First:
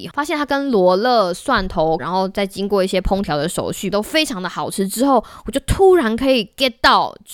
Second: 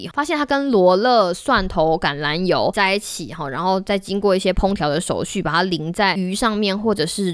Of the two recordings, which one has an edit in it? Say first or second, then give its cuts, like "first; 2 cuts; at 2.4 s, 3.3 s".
first; 2 cuts; at 2.0 s, 3.9 s